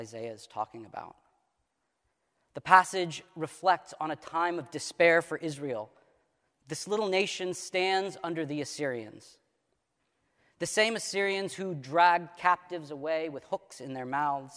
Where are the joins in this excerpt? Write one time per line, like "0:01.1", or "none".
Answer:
none